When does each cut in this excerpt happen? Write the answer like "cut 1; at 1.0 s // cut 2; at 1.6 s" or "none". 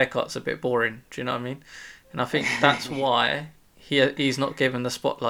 none